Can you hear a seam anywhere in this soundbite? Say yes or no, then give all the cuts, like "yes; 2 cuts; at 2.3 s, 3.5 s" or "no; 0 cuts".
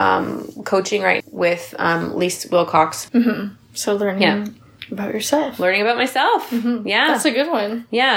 yes; 2 cuts; at 1.2 s, 3.1 s